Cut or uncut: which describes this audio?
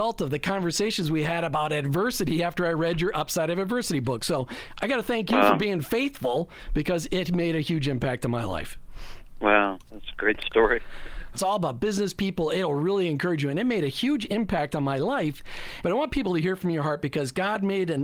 cut